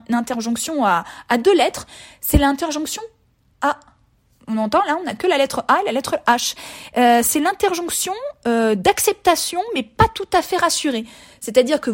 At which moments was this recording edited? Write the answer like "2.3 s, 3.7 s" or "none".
none